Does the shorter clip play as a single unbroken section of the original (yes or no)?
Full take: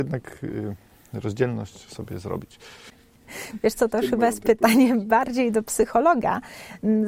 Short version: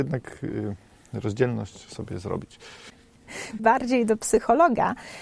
no